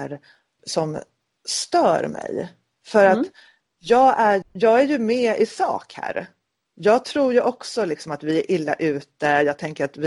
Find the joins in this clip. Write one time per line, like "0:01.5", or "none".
0:04.4